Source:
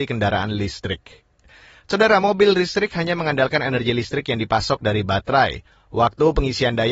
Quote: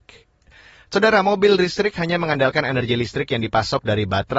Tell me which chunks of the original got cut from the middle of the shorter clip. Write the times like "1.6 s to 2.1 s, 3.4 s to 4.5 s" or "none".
none